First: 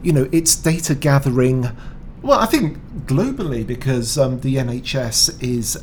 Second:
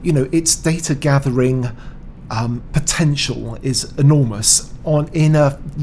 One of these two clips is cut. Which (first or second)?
first